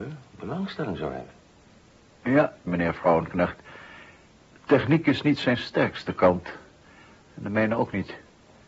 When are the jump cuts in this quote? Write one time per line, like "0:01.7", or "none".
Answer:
0:02.7